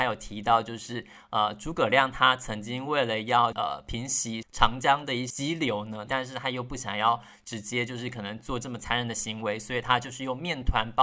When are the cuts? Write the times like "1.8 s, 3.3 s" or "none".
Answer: 6.1 s